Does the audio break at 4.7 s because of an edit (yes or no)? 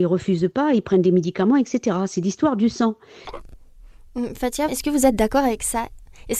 yes